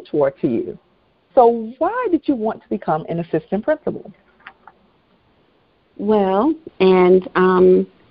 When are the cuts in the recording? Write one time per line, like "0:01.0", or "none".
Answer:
0:01.3
0:06.7

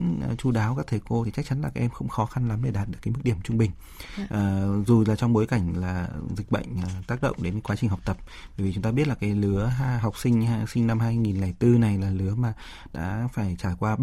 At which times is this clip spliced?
0:04.3

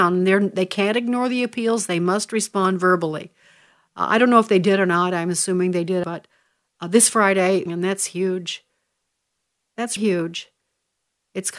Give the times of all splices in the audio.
0:06.0
0:07.7
0:10.0

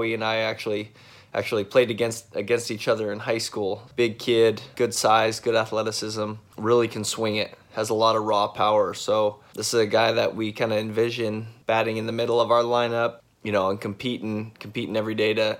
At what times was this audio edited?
0:03.9

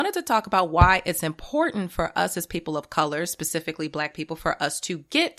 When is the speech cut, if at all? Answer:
none

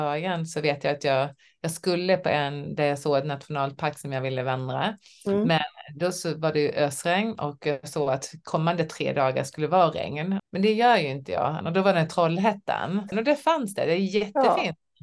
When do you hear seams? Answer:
0:10.4
0:11.6
0:13.1

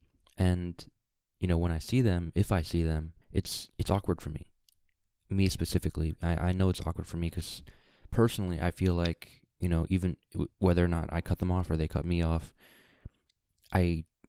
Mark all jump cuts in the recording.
0:03.2

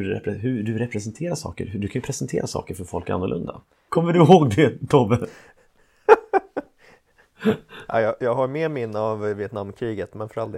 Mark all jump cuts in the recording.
0:03.9

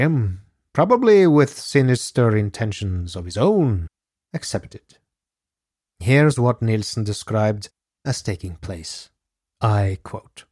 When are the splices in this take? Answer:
0:05.9

